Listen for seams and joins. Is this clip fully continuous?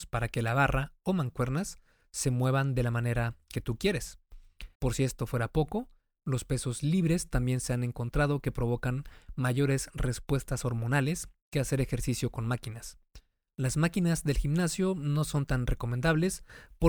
no; 2 cuts; at 4.7 s, 13.5 s

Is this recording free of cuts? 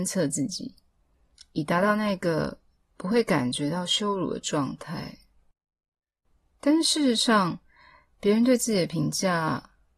yes; 0 cuts

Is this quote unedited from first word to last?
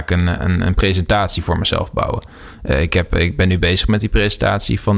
yes; 0 cuts

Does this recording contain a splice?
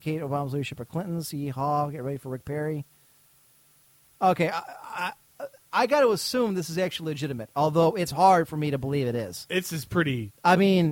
no; 0 cuts

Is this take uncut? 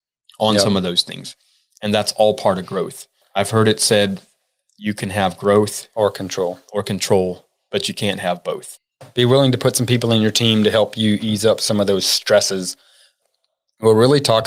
yes; 0 cuts

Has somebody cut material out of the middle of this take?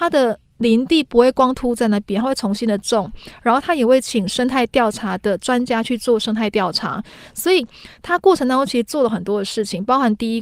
yes; 1 cut; at 1.5 s

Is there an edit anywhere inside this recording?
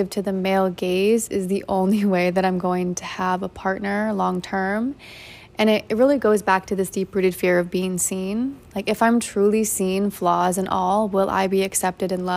no; 0 cuts

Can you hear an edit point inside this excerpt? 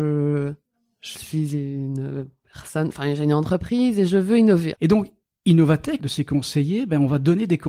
yes; 2 cuts; at 4.7 s, 6.0 s

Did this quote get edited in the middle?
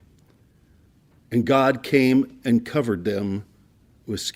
no; 0 cuts

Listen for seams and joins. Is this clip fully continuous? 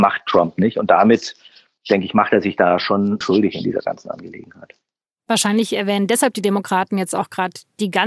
no; 1 cut; at 3.2 s

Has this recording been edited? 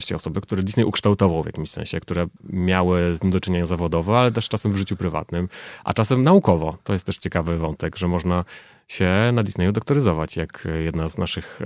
no; 0 cuts

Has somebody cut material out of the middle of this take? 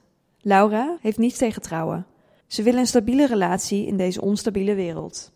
yes; 2 cuts; at 1.0 s, 2.4 s

